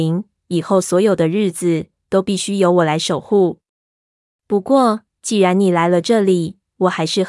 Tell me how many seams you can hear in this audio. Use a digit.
0